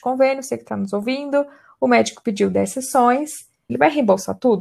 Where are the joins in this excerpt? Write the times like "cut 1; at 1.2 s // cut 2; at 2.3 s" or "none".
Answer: cut 1; at 3.7 s

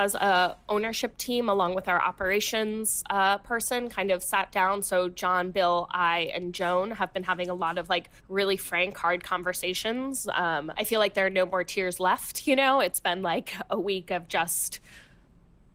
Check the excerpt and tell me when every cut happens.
cut 1; at 8.2 s // cut 2; at 10.7 s

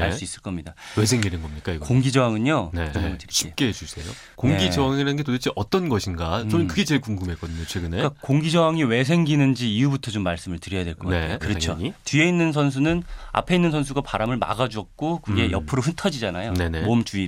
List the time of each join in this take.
cut 1; at 2.9 s // cut 2; at 4.3 s // cut 3; at 11.4 s

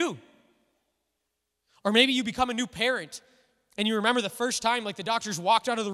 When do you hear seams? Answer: none

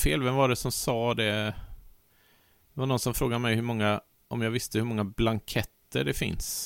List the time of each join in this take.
none

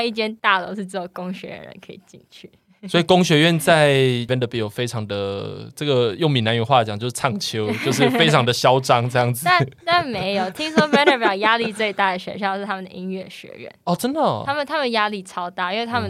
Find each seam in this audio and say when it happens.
none

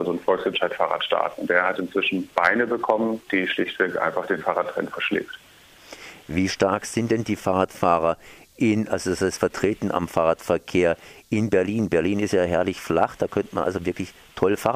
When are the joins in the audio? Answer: cut 1; at 3.3 s

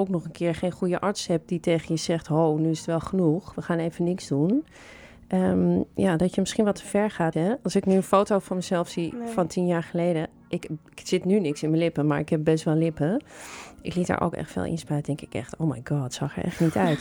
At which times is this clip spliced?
cut 1; at 7.3 s

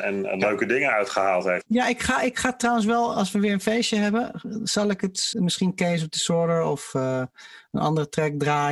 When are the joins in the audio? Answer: cut 1; at 1.6 s // cut 2; at 5.3 s

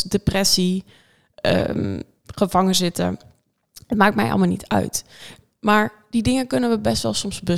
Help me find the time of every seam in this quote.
none

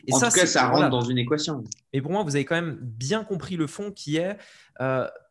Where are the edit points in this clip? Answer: cut 1; at 1.9 s

